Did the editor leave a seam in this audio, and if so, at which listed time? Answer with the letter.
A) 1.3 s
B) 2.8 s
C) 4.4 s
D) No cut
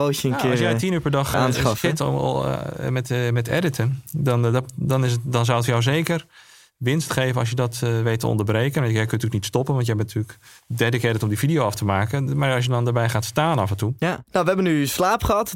A